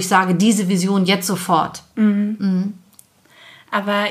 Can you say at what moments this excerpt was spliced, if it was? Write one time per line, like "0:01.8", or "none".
none